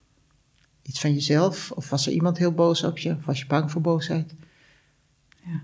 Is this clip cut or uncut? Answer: uncut